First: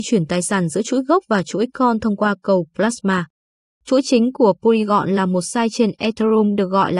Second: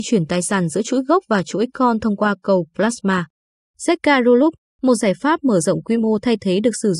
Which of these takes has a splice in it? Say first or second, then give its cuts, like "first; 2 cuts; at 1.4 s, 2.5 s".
first; 1 cut; at 3.7 s